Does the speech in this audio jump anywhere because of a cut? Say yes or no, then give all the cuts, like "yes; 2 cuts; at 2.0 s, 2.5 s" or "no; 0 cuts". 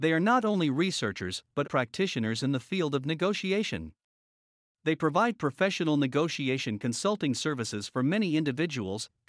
yes; 1 cut; at 1.6 s